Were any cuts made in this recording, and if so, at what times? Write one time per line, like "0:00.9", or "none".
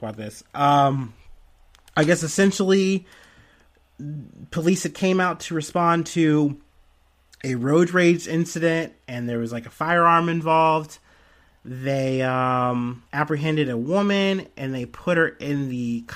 0:13.1